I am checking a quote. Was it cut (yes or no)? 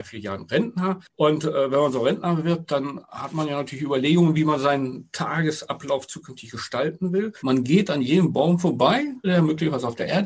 yes